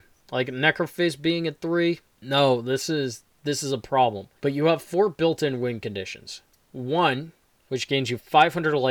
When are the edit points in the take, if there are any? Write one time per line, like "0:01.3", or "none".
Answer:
0:04.4
0:07.6